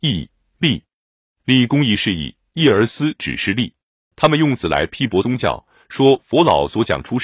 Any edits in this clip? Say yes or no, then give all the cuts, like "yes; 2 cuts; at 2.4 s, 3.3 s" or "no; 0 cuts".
yes; 1 cut; at 4.1 s